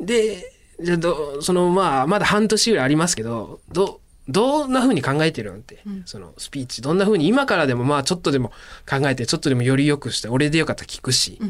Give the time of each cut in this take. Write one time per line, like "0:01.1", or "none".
none

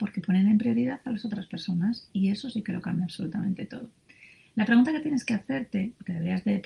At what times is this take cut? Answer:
none

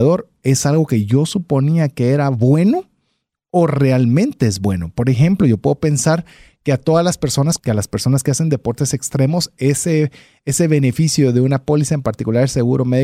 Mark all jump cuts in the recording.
0:07.6

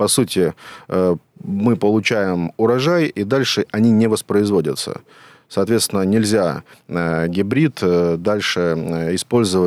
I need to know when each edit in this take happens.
none

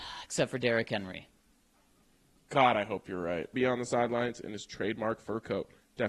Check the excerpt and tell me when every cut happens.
0:03.5

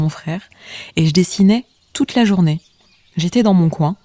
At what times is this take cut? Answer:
none

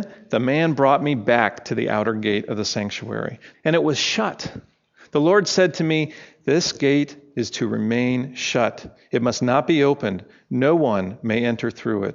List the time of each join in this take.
0:03.5

